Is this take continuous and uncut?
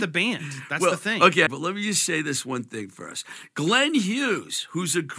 no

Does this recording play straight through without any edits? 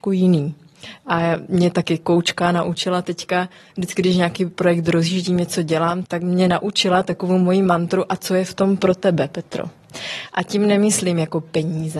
no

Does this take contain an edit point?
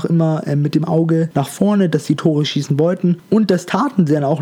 no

